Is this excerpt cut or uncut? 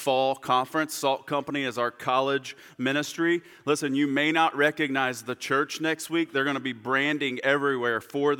uncut